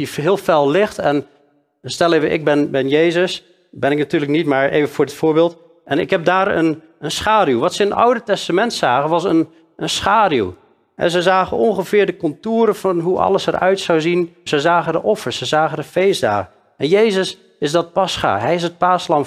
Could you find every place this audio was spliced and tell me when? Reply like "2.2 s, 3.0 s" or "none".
14.5 s